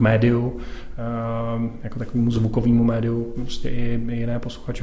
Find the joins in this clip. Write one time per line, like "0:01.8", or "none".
none